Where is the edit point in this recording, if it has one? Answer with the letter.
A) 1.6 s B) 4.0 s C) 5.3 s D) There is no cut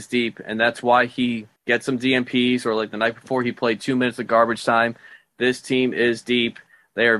A